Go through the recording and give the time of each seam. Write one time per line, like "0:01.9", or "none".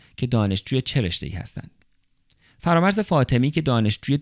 none